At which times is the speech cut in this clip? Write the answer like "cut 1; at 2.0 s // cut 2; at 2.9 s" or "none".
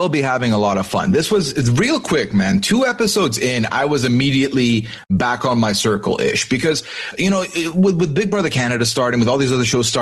none